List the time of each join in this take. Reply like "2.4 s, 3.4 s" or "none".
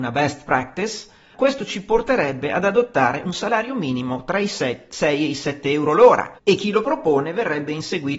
1.3 s, 6.4 s